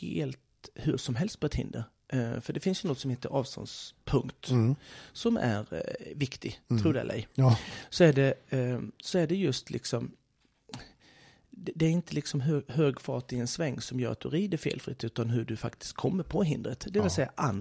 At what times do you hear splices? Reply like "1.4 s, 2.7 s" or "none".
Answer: none